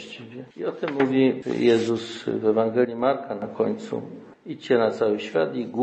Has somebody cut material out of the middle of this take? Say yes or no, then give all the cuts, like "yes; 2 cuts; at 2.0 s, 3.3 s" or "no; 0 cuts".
no; 0 cuts